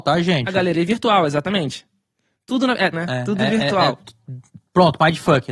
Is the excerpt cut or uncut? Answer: cut